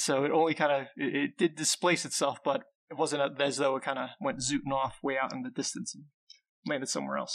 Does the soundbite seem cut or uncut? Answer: uncut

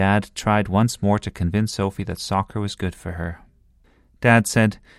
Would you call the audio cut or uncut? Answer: uncut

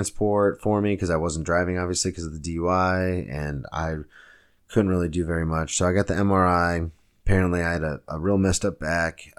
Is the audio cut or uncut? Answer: uncut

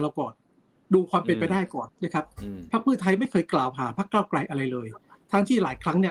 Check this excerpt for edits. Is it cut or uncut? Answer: cut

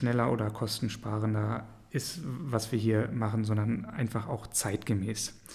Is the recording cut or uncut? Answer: uncut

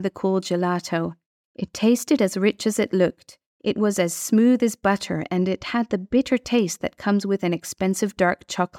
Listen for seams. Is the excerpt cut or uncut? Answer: uncut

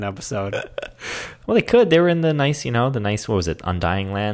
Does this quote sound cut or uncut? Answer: cut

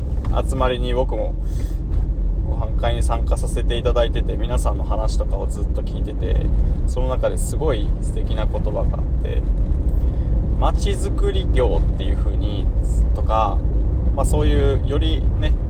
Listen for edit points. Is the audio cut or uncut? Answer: uncut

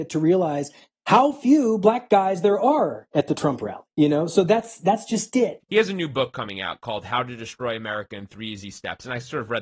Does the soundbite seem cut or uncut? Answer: cut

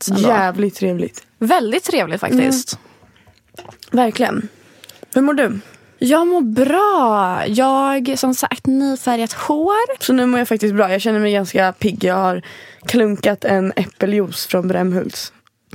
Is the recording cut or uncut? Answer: cut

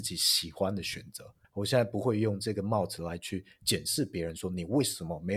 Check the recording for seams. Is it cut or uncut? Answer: cut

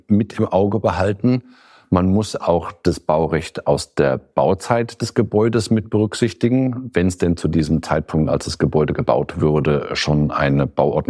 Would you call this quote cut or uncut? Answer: uncut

